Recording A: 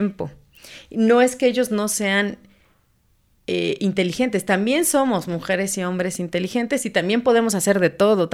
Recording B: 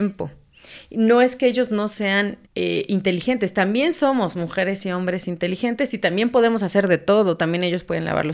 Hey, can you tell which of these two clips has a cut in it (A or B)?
B